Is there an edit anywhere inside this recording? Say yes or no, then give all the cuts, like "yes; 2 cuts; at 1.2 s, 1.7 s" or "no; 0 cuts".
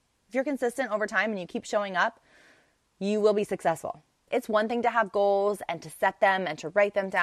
yes; 1 cut; at 4.3 s